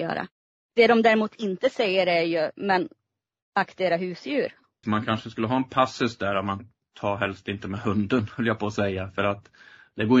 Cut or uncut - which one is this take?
cut